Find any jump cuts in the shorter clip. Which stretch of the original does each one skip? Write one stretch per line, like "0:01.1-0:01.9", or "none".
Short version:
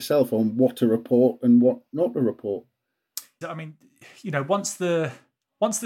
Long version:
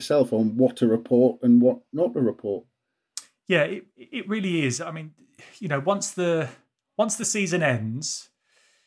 0:03.4-0:04.8